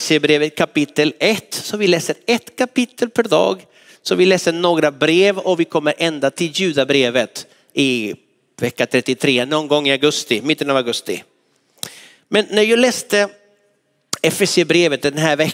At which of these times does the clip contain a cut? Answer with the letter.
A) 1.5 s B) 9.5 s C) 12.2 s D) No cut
D